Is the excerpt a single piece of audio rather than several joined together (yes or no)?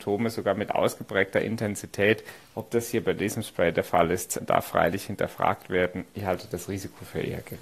no